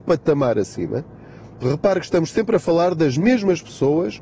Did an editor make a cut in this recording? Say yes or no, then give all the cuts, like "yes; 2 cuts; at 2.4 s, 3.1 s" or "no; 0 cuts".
yes; 1 cut; at 1.6 s